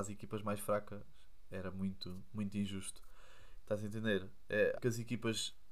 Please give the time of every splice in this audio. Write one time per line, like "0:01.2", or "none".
0:03.6
0:04.7